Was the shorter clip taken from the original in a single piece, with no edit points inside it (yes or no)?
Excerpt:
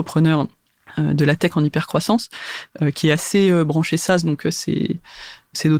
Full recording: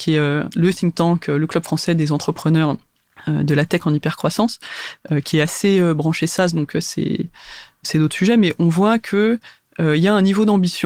yes